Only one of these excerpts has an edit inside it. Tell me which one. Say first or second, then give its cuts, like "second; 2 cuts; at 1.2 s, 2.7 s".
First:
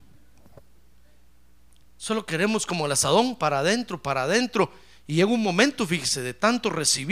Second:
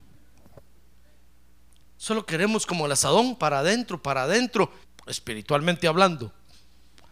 second; 1 cut; at 4.8 s